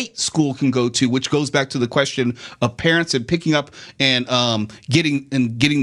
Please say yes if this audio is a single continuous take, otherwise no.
yes